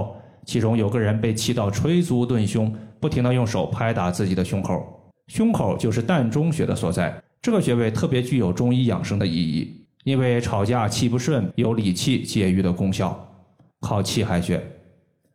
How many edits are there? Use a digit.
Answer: 2